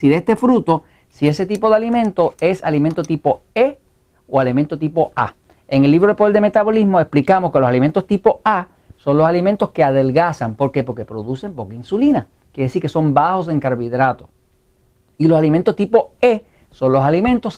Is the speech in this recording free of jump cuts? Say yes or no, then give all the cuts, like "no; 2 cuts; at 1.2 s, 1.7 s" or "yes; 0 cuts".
yes; 0 cuts